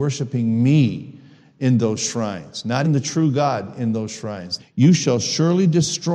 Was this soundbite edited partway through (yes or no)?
yes